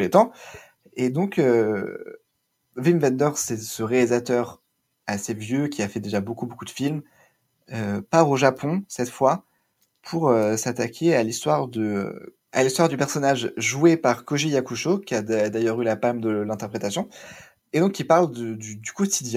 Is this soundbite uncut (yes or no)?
yes